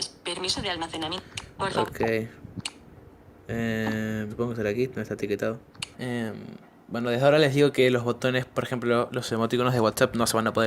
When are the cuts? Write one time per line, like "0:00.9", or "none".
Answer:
0:04.3
0:05.9
0:09.1